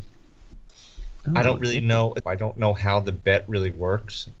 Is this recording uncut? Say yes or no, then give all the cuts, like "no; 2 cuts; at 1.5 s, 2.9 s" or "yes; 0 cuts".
no; 1 cut; at 2.2 s